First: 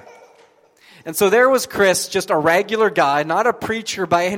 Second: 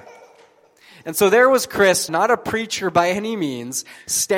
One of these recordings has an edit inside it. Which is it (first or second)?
second